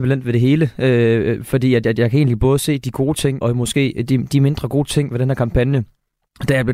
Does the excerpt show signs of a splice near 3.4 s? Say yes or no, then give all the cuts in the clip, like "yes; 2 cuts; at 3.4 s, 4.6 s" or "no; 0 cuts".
yes; 1 cut; at 3.4 s